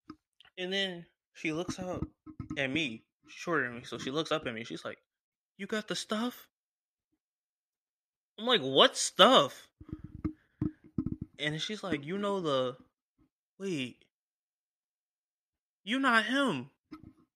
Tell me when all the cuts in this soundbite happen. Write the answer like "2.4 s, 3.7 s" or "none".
none

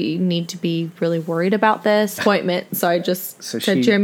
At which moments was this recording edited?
2.2 s

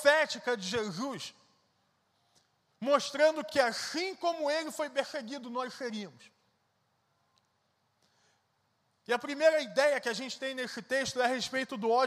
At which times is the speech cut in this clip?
none

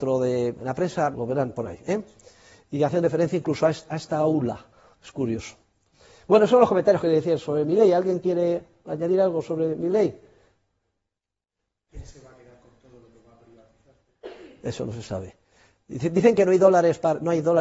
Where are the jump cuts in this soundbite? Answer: 1.1 s

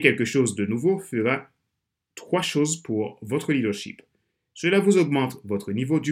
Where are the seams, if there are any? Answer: none

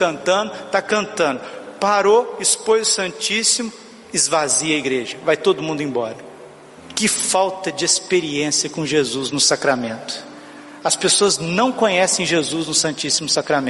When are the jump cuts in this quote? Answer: none

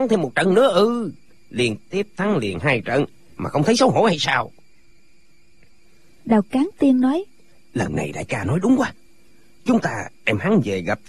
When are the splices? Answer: none

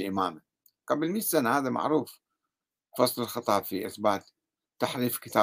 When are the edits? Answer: none

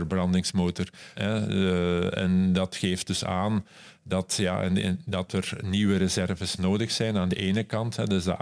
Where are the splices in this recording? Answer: 1.1 s

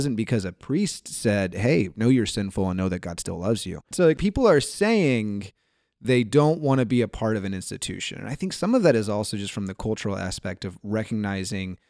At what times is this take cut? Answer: 3.9 s

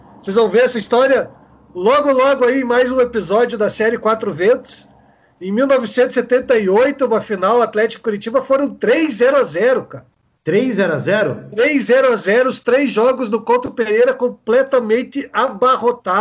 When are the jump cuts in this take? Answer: none

